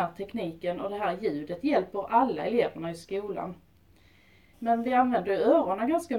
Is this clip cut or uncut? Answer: cut